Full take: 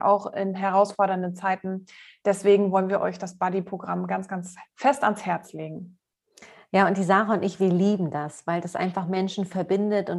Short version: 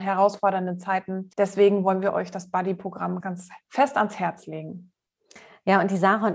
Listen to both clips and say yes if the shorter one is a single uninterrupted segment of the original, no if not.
no